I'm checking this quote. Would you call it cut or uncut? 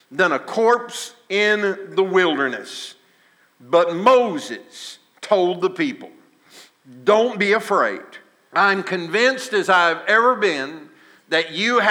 cut